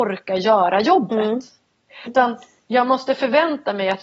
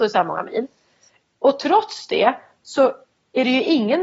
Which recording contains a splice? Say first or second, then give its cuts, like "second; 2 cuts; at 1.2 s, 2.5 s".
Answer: first; 1 cut; at 2.1 s